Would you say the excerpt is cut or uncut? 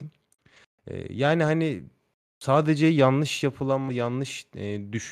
cut